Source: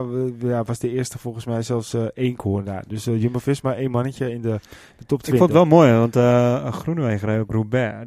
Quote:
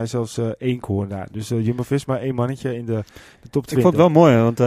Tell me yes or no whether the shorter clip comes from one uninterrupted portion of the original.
yes